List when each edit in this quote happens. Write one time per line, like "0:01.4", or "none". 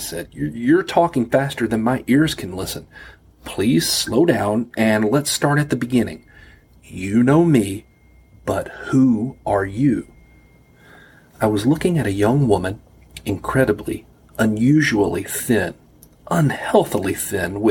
none